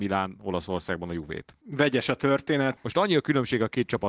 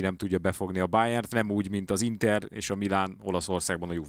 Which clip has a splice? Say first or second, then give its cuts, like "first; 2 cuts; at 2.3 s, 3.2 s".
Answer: first; 2 cuts; at 1.6 s, 2.8 s